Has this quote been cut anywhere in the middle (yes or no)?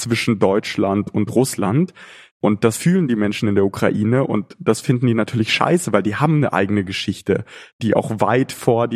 no